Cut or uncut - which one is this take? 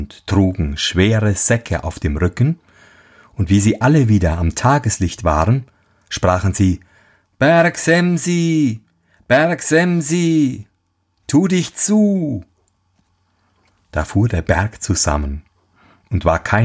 uncut